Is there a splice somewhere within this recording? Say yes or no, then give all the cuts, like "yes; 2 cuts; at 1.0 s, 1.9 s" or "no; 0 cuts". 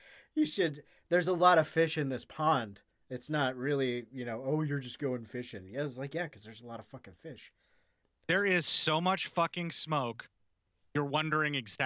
no; 0 cuts